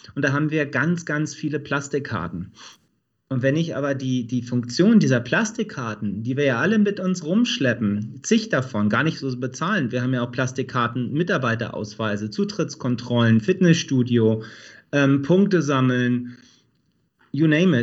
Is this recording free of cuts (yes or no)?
yes